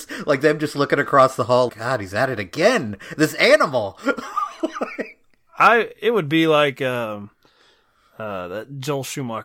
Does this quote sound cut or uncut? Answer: cut